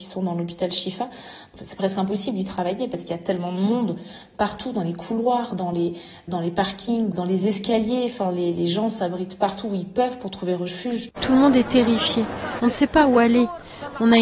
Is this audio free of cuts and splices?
no; 3 cuts; at 7.1 s, 11.2 s, 12.6 s

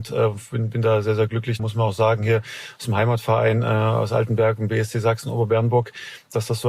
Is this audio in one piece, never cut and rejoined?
no; 1 cut; at 1.6 s

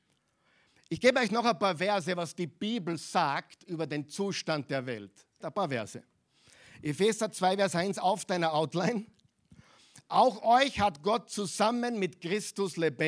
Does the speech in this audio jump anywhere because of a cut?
yes; 1 cut; at 5.4 s

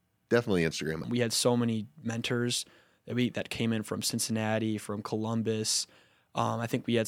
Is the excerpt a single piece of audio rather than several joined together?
no; 1 cut; at 1.0 s

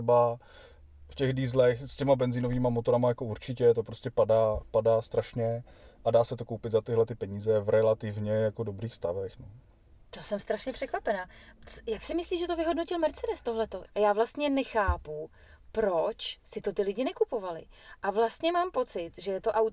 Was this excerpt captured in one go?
no; 1 cut; at 13.9 s

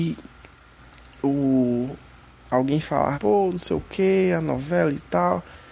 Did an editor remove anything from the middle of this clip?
yes; 1 cut; at 3.1 s

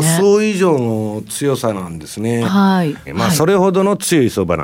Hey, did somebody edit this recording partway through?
yes; 1 cut; at 3.1 s

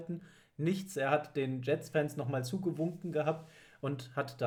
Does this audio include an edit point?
no; 0 cuts

